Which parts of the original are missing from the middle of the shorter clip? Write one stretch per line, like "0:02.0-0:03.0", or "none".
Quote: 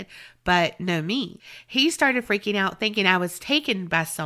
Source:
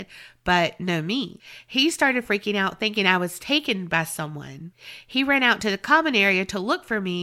none